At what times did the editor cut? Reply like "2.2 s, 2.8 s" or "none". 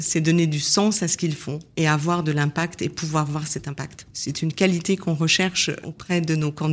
4.1 s, 5.8 s